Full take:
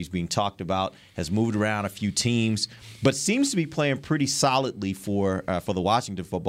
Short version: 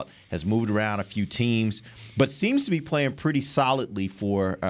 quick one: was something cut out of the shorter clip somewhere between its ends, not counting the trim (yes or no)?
no